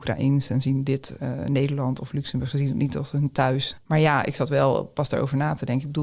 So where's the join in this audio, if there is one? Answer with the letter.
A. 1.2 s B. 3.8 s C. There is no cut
A